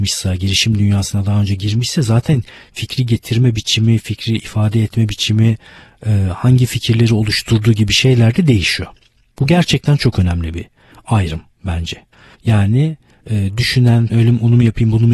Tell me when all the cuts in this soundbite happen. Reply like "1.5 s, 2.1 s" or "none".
12.3 s, 14.1 s